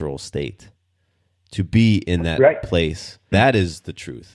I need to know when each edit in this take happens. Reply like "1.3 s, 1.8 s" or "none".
3.3 s

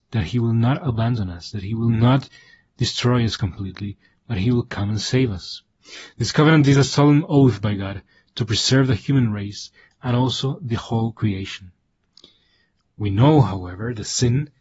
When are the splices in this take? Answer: none

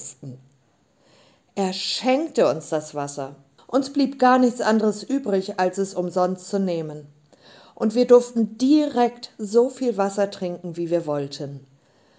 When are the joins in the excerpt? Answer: 3.6 s

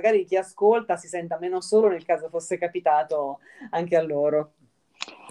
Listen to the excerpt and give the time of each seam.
none

